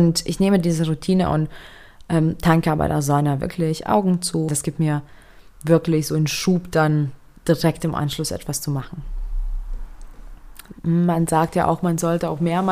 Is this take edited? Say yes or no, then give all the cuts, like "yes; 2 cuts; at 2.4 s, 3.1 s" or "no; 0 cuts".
yes; 2 cuts; at 4.5 s, 10.7 s